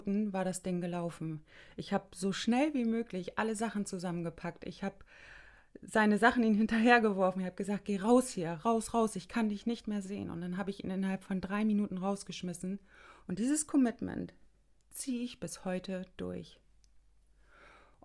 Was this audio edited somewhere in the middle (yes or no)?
yes